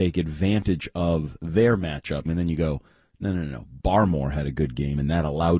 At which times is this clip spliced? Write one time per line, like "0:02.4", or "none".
0:02.3